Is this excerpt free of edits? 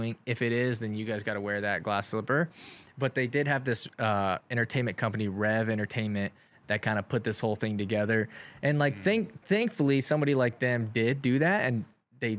yes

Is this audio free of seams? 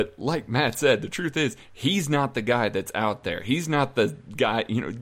yes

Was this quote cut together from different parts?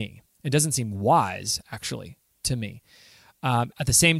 no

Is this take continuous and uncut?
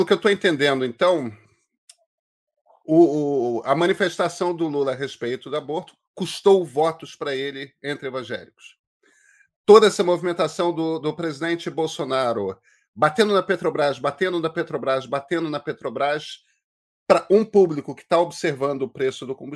yes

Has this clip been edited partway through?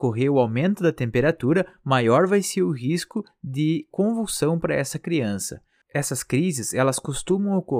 no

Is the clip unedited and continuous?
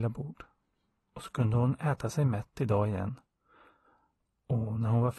yes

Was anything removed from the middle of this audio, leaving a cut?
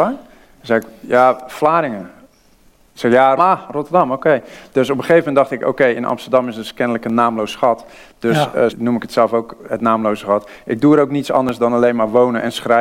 yes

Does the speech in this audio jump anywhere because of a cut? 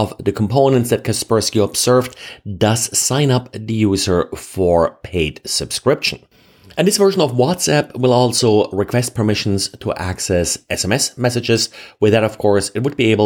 no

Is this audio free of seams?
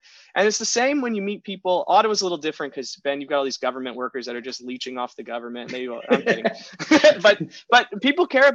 yes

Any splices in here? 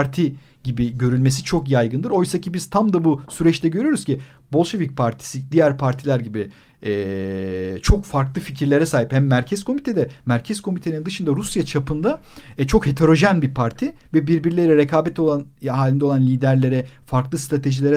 no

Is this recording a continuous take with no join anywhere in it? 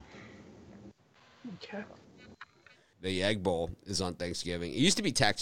no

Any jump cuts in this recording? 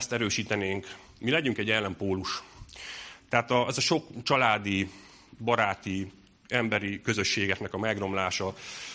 no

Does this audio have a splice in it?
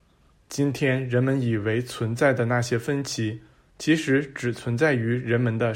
no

